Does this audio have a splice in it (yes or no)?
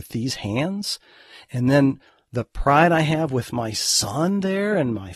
no